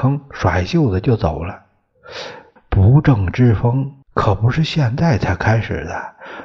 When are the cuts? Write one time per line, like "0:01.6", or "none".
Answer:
0:02.6
0:04.0